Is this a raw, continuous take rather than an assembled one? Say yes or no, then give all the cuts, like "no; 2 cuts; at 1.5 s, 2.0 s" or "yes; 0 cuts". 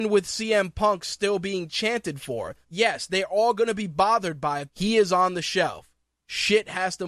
no; 2 cuts; at 2.6 s, 4.7 s